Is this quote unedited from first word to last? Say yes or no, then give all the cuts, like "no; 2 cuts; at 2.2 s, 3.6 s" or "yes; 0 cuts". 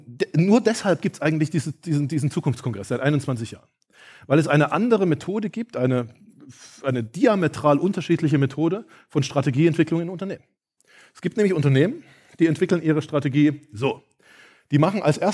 yes; 0 cuts